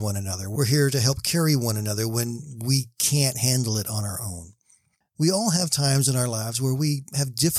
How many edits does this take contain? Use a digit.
1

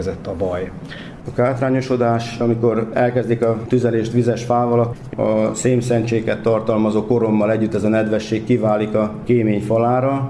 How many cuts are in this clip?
1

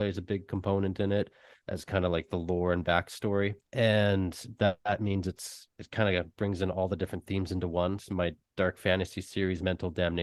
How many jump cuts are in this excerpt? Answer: 2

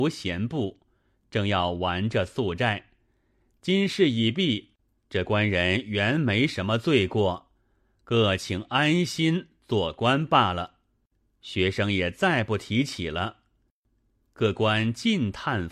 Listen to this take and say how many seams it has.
0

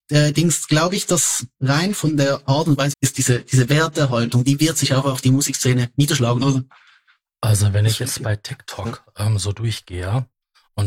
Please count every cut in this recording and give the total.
2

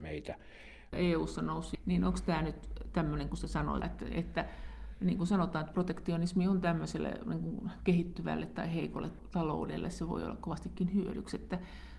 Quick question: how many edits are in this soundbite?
2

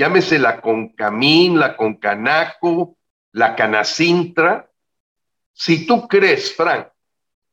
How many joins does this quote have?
0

